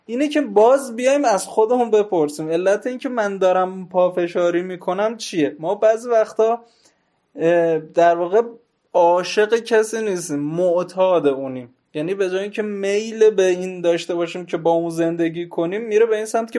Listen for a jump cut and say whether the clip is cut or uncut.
uncut